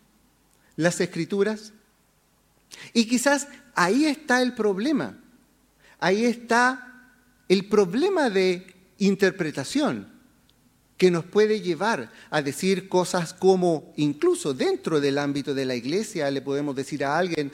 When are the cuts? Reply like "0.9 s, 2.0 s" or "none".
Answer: none